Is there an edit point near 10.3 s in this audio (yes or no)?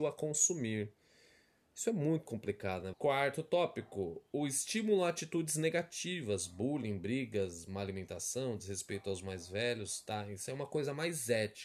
no